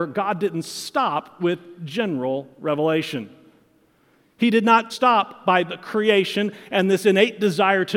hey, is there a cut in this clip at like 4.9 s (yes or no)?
yes